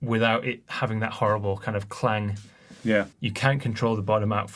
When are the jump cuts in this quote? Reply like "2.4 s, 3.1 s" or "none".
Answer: 3.1 s